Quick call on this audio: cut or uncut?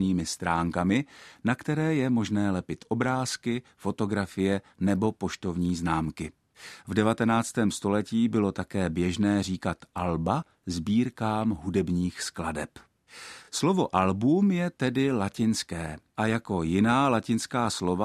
uncut